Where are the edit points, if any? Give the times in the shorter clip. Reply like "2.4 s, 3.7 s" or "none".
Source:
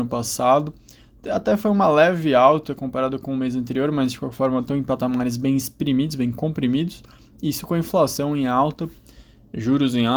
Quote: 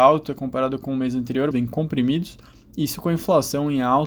1.5 s